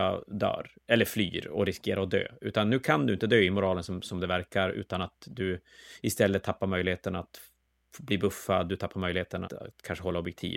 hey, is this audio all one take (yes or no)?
no